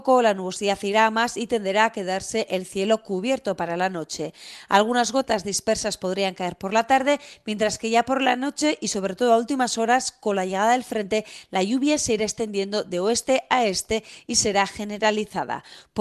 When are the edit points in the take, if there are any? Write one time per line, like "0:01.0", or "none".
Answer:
none